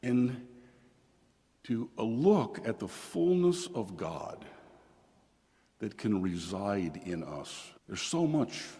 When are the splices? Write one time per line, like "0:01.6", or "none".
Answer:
0:07.8